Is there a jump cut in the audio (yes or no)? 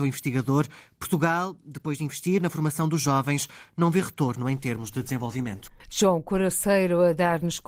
no